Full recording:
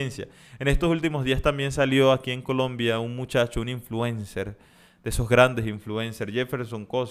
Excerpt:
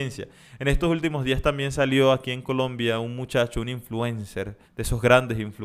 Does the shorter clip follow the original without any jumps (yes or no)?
no